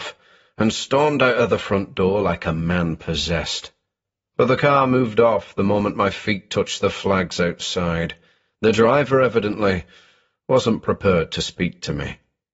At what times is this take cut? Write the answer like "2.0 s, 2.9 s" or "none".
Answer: none